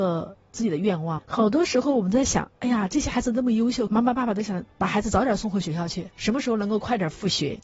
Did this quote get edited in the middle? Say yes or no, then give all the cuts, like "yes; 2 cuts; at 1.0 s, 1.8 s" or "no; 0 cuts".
no; 0 cuts